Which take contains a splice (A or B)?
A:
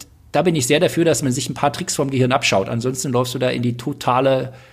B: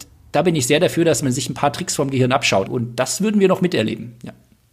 B